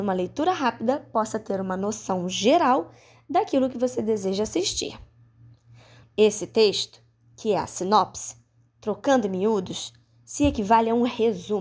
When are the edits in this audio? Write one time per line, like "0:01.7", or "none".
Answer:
0:06.0